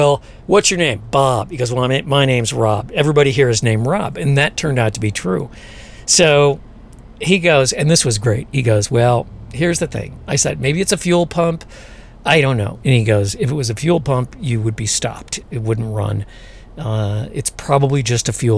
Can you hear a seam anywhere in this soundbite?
no; 0 cuts

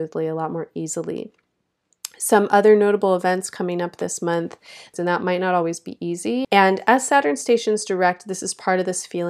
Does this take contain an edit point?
yes; 2 cuts; at 4.9 s, 6.4 s

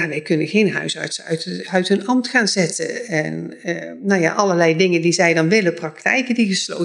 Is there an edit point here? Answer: no; 0 cuts

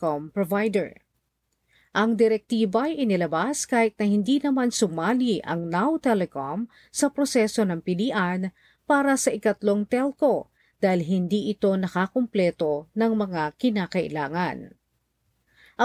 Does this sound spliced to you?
no; 0 cuts

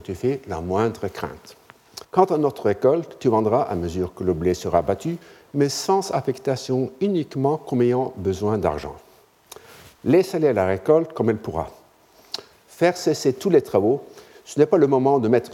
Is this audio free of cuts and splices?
no; 3 cuts; at 2.0 s, 10.0 s, 12.5 s

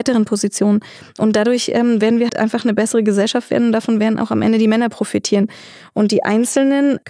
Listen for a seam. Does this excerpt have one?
yes; 1 cut; at 2.3 s

